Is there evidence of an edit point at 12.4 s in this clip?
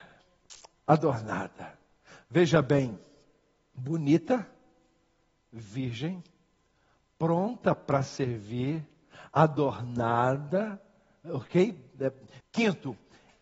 yes; 1 cut; at 12.4 s

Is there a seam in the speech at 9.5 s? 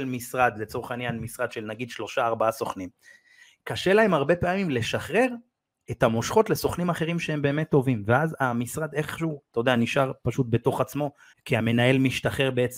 yes; 2 cuts; at 9.5 s, 11.3 s

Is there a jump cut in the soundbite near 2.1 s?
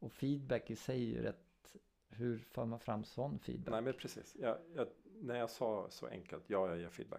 yes; 1 cut; at 2.1 s

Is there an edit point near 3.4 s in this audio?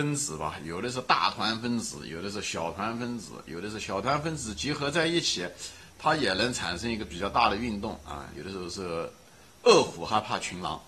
no; 1 cut; at 8.3 s

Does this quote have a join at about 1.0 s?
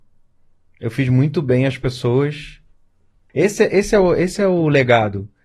no; 1 cut; at 3.3 s

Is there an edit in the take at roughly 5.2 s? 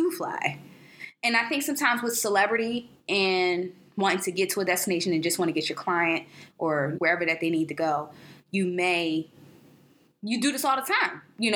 no; 1 cut; at 6.9 s

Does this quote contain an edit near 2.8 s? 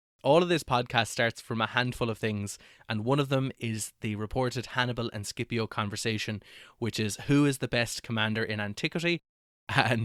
no; 0 cuts

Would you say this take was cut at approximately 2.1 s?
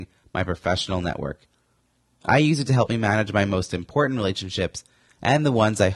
no; 0 cuts

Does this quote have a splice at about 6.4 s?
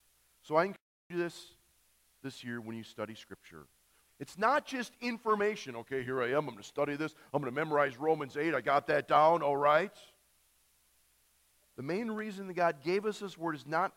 no; 1 cut; at 4.1 s

